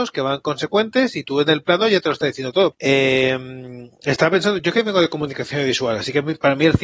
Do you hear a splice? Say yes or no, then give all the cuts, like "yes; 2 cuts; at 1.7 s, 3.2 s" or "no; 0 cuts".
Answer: yes; 2 cuts; at 2.7 s, 4.6 s